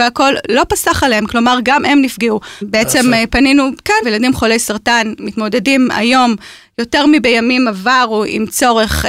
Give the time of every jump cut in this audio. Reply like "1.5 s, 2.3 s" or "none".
2.6 s, 4.0 s